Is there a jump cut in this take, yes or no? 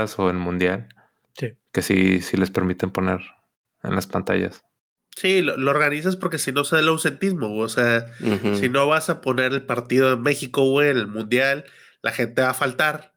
no